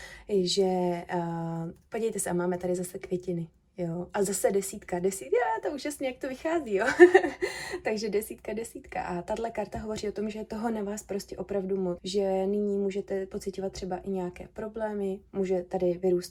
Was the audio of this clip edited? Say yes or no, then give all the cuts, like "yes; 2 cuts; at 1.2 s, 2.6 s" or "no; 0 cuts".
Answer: yes; 1 cut; at 12.0 s